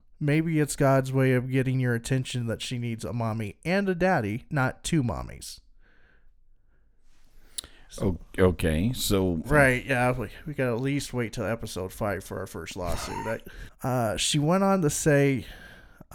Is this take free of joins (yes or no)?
no